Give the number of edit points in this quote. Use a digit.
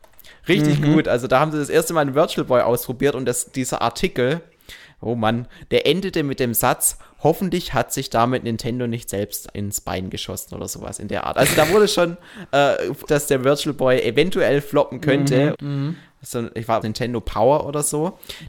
3